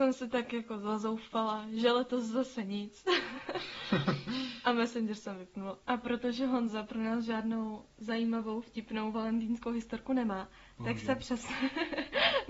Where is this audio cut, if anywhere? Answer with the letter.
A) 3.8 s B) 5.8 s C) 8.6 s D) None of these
B